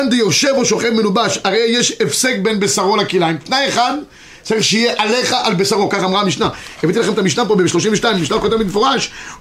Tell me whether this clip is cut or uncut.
uncut